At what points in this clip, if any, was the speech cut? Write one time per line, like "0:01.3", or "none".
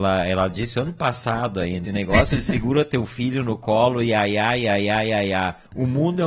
0:01.8